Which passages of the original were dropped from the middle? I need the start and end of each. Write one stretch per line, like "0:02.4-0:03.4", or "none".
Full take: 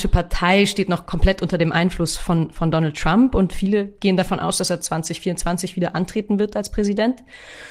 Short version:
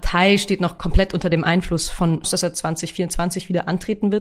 0:02.5-0:04.5